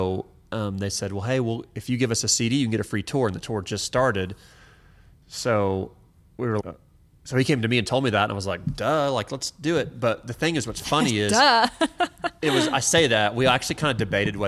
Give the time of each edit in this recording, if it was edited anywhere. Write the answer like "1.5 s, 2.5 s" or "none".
6.6 s